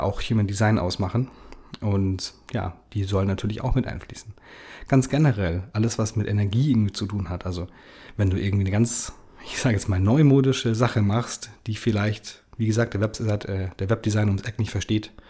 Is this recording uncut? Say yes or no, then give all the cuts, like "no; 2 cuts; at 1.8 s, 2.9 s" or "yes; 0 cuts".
yes; 0 cuts